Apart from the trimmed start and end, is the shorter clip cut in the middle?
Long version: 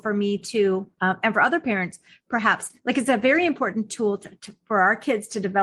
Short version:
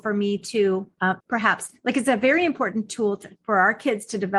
yes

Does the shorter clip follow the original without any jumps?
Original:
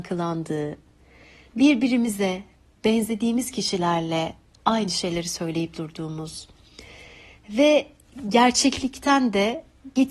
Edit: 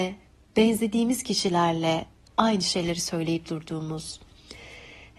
yes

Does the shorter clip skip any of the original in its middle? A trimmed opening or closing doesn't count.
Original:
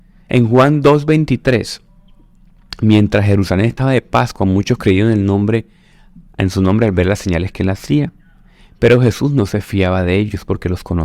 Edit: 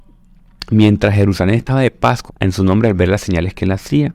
yes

